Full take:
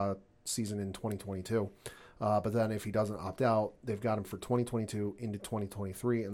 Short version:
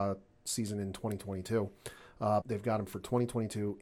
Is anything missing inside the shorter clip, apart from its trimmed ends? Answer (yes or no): yes